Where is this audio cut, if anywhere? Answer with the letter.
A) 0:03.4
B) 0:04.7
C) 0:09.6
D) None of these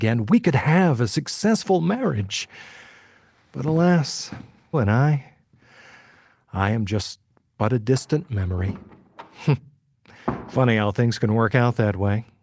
B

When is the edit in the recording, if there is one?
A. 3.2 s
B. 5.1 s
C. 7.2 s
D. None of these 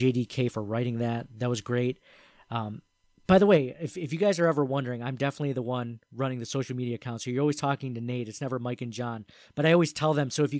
D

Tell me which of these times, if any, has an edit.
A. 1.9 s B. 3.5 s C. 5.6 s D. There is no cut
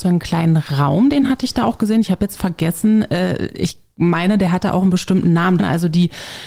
C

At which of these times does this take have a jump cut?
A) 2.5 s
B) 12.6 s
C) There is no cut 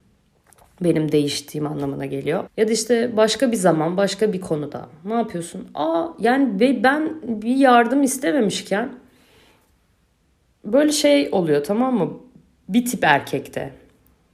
A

